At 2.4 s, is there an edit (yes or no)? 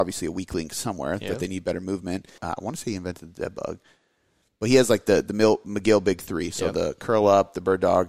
yes